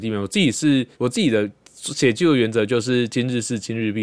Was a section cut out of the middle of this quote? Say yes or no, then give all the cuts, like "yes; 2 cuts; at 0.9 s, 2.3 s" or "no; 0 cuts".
yes; 1 cut; at 0.9 s